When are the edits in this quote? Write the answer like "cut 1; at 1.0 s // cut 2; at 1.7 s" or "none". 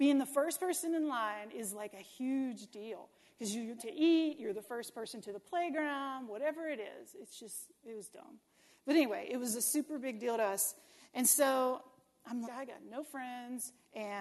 cut 1; at 3.8 s // cut 2; at 12.4 s